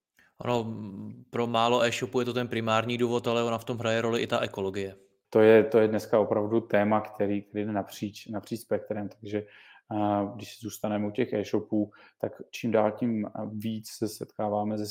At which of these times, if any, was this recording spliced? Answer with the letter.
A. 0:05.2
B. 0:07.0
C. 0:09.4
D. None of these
A